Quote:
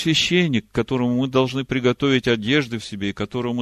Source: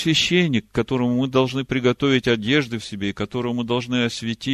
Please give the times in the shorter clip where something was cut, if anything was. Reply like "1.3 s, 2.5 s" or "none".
none